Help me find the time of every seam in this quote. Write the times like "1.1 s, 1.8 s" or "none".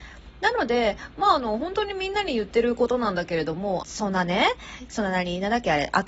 3.8 s, 4.9 s